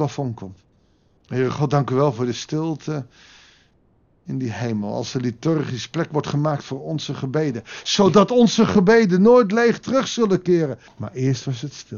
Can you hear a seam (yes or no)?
yes